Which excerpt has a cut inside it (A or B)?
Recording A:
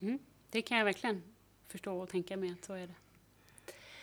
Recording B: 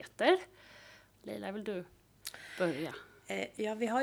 B